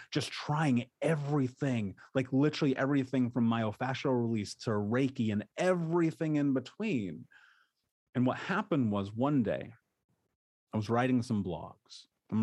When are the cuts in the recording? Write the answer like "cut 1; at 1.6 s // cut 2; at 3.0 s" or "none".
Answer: none